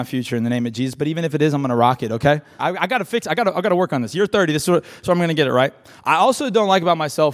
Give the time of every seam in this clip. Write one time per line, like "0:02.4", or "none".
0:02.6